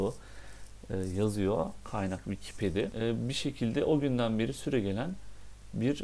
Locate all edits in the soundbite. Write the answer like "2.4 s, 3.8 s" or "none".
none